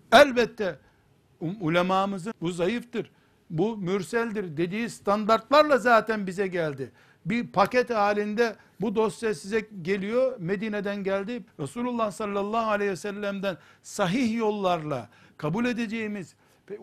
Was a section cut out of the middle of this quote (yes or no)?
yes